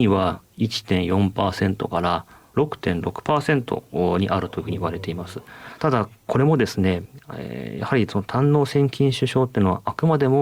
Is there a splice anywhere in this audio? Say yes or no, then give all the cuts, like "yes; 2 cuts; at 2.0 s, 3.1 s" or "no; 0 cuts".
yes; 1 cut; at 5.8 s